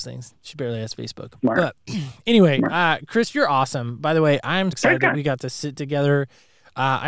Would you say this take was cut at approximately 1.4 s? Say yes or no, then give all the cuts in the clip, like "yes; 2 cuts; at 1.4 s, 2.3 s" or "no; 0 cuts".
no; 1 cut; at 4.7 s